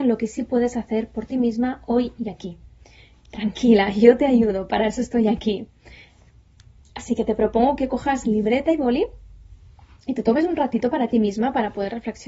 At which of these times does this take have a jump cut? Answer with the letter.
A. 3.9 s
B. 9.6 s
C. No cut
C